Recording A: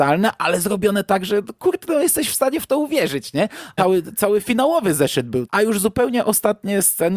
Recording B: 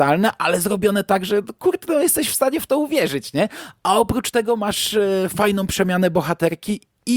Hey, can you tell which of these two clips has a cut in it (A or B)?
A